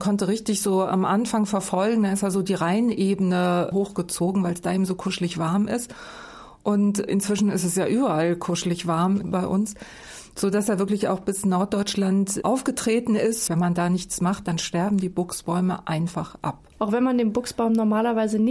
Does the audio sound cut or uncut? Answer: cut